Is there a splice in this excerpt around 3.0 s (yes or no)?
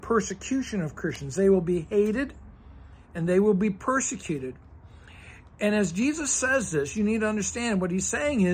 yes